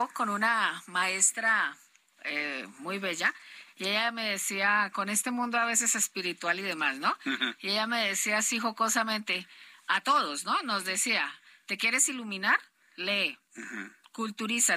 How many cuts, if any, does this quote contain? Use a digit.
0